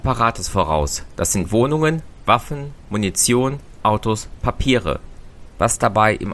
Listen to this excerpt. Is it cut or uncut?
uncut